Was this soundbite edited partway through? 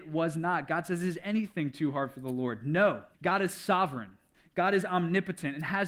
yes; 1 cut; at 3.1 s

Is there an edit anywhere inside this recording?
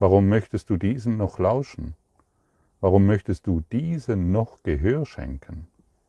no; 0 cuts

